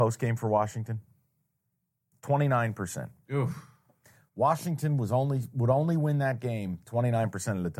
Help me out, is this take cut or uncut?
uncut